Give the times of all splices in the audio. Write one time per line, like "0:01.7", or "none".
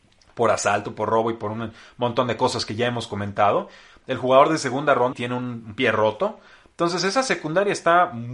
0:05.1